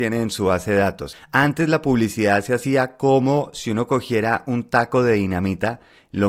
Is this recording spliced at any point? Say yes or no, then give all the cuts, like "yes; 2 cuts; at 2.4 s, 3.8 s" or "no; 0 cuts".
yes; 1 cut; at 1.1 s